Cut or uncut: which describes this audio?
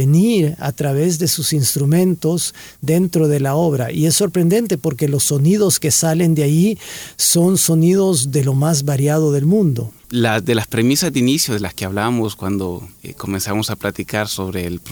cut